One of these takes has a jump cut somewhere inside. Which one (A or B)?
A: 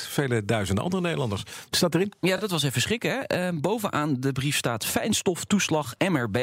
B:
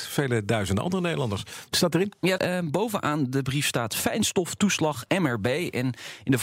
B